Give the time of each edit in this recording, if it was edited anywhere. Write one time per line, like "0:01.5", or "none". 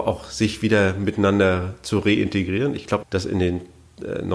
0:03.0